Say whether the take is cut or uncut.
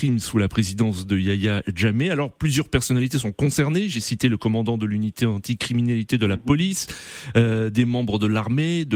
uncut